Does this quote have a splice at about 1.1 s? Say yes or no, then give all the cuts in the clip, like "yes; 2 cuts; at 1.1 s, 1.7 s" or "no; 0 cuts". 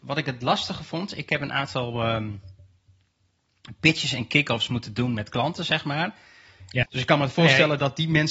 no; 1 cut; at 6.8 s